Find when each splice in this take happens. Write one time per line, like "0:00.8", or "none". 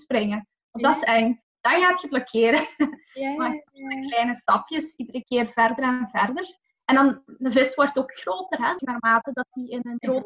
none